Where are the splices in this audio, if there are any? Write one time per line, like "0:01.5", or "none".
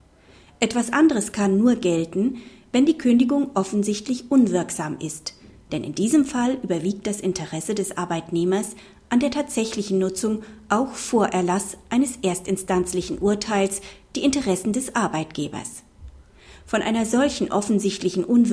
none